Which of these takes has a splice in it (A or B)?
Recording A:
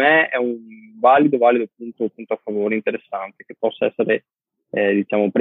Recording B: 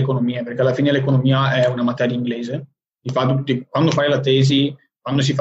A